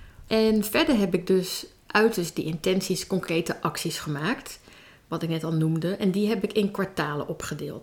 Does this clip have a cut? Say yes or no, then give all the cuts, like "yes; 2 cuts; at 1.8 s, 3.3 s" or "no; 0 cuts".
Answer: yes; 1 cut; at 1.9 s